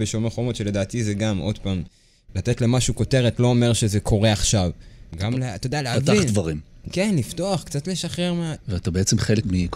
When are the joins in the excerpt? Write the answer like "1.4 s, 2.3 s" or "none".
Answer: 5.1 s, 8.6 s